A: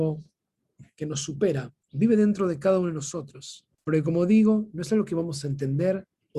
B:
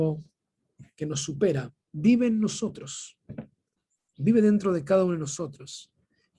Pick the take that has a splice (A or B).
A